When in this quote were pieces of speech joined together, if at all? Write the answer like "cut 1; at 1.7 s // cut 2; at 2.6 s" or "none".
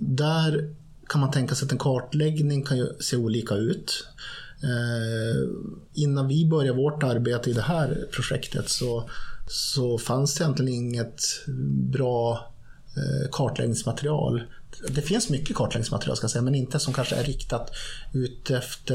none